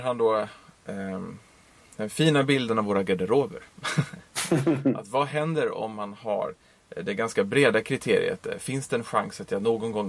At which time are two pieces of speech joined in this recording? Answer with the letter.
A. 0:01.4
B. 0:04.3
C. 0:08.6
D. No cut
D